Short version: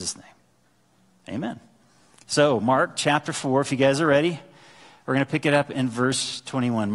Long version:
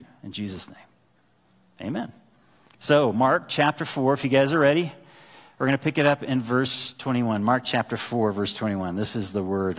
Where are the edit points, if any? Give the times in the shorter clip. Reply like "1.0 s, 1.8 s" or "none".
none

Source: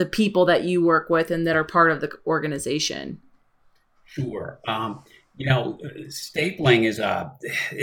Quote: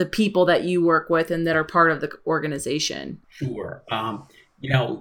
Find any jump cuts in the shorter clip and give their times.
3.2 s

